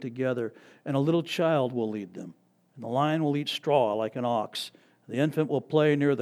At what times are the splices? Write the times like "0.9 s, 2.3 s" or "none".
2.7 s